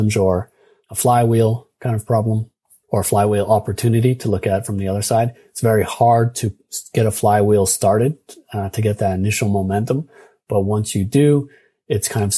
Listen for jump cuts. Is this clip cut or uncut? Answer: uncut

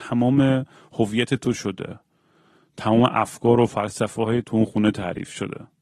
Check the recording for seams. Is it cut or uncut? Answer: cut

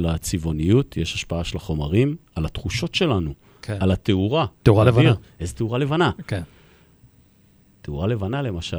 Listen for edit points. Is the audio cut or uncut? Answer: cut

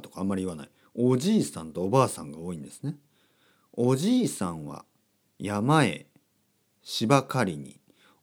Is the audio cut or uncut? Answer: uncut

